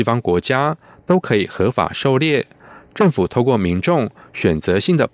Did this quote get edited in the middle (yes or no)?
no